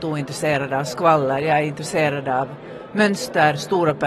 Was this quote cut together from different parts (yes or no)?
no